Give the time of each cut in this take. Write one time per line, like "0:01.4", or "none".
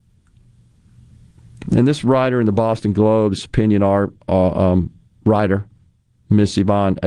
none